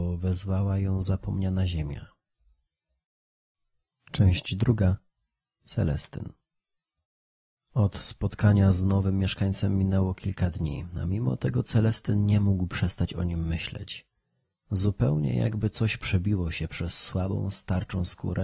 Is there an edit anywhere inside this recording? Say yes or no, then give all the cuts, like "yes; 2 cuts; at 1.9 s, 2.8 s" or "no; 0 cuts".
no; 0 cuts